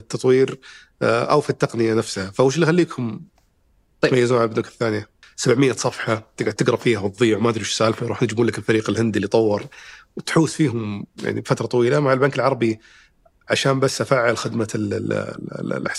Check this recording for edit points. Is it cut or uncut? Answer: cut